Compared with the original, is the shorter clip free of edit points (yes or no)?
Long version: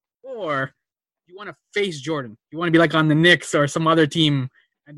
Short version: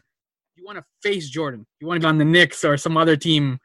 no